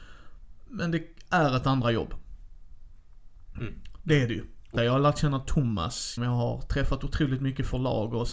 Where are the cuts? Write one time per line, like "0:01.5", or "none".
0:04.8
0:06.2